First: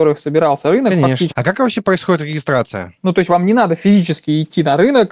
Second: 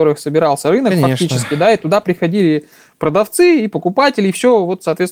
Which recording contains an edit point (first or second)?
first